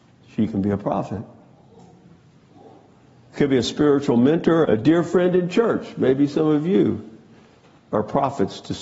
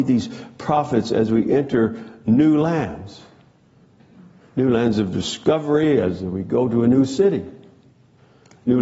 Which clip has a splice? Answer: first; 1 cut; at 4.6 s

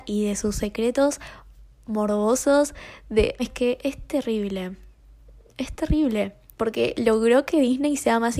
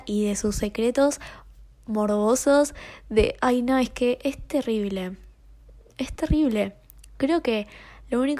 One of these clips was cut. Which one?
first; 2 cuts; at 3.4 s, 6.5 s

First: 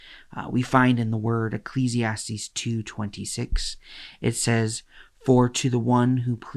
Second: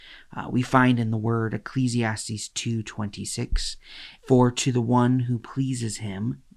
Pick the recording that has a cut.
second; 1 cut; at 4.2 s

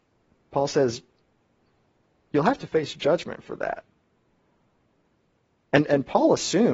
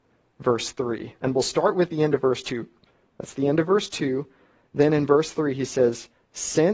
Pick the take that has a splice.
second; 1 cut; at 3.0 s

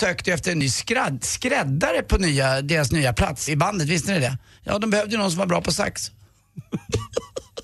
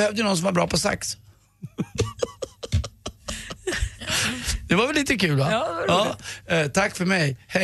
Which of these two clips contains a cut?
first; 1 cut; at 3.5 s

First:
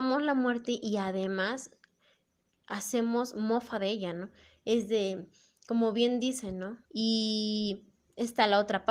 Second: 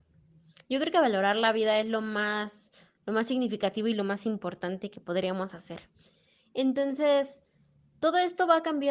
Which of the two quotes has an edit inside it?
first; 1 cut; at 6.8 s

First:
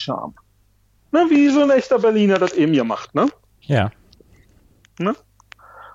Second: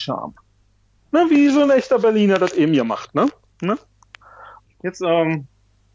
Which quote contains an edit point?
second; 2 cuts; at 3.5 s, 4.6 s

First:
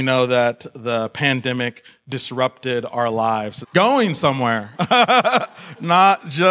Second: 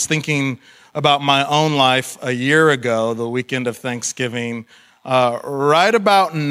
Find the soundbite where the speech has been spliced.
first; 2 cuts; at 3.6 s, 4.7 s

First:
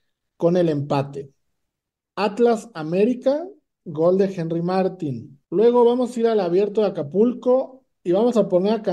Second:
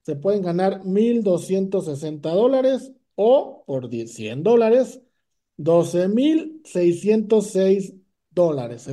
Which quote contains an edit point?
first; 1 cut; at 5.4 s

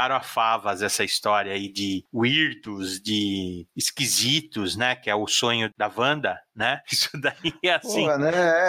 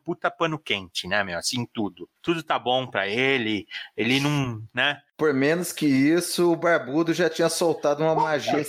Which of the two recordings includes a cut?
first; 1 cut; at 6.8 s

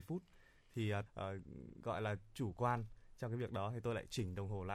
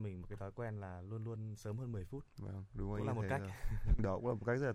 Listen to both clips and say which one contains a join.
first; 1 cut; at 1.1 s

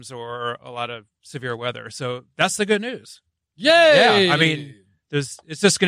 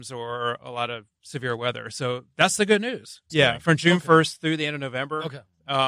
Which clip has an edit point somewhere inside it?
second; 1 cut; at 3.3 s

